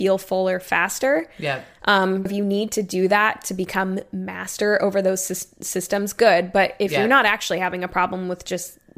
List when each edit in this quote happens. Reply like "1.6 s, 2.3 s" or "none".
2.3 s